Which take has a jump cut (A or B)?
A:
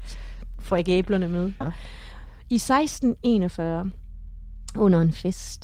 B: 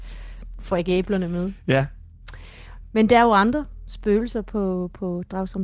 A